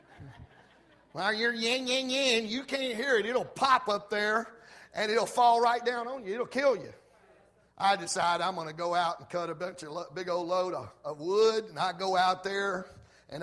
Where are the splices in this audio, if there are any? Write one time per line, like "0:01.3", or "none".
0:07.7
0:11.0